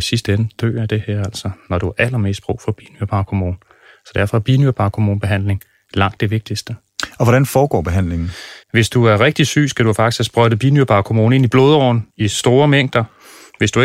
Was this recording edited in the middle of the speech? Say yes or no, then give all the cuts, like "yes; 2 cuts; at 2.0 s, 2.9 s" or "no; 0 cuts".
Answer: yes; 2 cuts; at 8.6 s, 12.1 s